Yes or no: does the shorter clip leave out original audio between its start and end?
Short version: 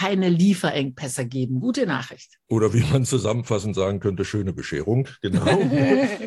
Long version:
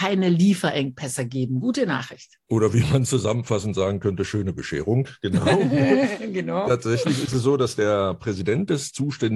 no